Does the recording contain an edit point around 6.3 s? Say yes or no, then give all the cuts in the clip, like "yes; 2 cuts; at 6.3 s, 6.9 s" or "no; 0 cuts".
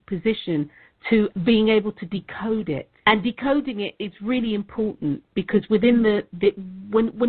no; 2 cuts; at 1.3 s, 3.0 s